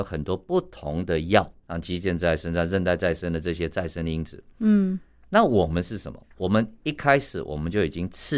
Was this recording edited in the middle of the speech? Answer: yes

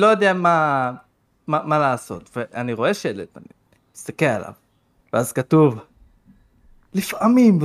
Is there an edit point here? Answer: no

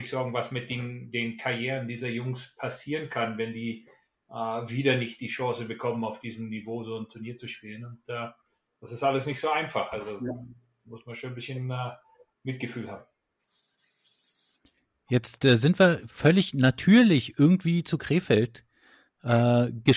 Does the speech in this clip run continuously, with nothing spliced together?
yes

